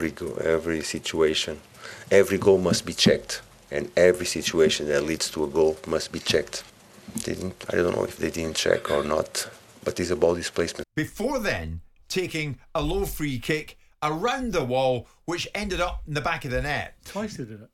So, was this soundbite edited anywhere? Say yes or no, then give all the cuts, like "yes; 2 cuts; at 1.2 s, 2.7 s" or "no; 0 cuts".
yes; 1 cut; at 10.8 s